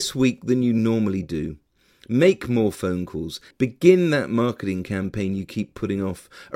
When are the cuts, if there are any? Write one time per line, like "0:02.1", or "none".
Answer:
0:03.5